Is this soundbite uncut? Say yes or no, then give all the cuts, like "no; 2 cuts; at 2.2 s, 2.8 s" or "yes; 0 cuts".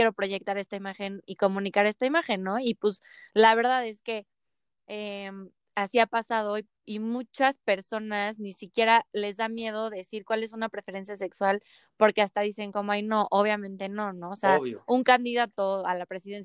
yes; 0 cuts